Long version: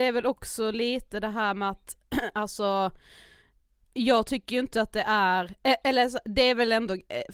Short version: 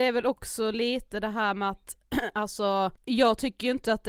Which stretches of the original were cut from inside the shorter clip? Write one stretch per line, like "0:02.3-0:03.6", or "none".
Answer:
0:03.0-0:03.8